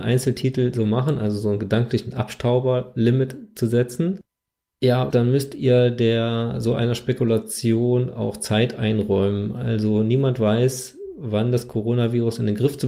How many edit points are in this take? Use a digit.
1